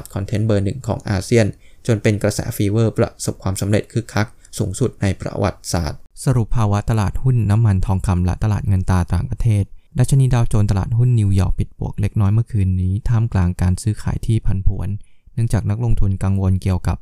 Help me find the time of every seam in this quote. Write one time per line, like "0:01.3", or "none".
0:09.9